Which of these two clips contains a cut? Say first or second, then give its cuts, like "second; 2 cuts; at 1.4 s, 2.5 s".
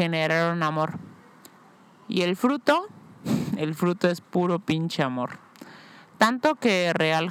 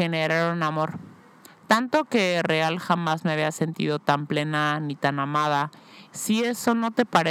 second; 2 cuts; at 1.5 s, 6.0 s